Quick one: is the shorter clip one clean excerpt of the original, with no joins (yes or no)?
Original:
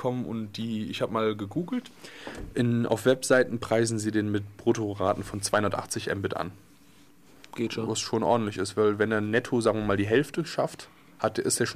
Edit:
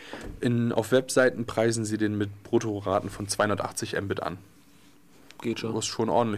yes